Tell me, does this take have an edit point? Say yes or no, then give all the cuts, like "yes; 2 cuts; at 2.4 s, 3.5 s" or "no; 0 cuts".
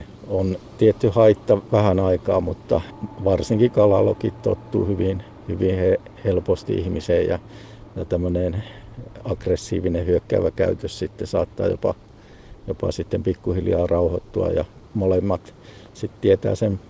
no; 0 cuts